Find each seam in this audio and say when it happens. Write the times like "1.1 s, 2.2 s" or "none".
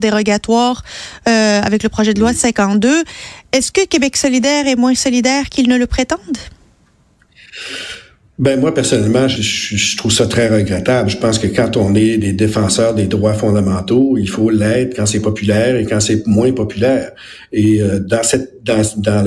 9.4 s